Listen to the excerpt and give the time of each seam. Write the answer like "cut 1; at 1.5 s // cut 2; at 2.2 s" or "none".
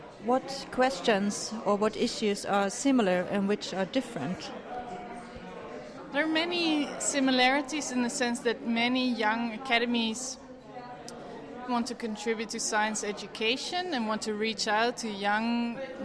cut 1; at 11.7 s